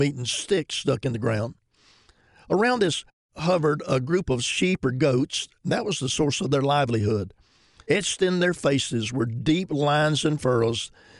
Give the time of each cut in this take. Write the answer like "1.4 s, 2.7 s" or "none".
7.8 s